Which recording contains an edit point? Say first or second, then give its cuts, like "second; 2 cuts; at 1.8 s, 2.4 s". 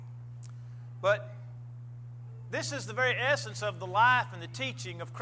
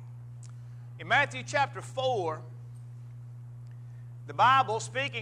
second; 1 cut; at 1.0 s